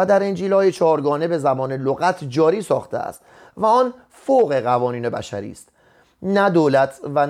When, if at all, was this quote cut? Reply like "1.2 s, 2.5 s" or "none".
none